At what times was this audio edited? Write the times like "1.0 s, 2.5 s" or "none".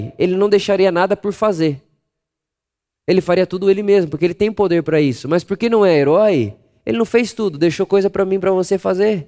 none